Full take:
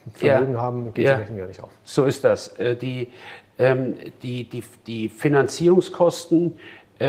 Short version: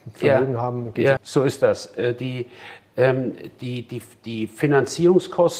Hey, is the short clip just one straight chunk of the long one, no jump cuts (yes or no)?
no